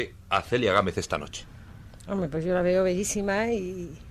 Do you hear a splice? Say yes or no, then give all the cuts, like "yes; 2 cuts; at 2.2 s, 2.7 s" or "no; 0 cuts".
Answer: no; 0 cuts